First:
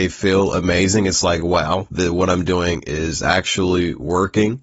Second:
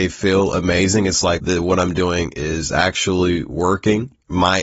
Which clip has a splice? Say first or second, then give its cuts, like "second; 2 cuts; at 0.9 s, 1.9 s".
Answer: second; 1 cut; at 1.4 s